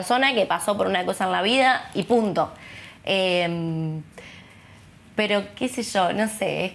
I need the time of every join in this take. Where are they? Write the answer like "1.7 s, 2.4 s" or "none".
none